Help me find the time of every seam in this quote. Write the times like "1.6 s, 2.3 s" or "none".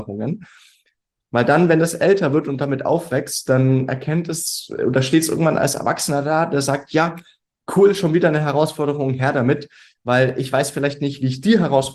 1.2 s